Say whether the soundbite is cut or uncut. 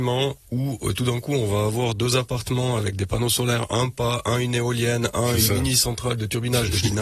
uncut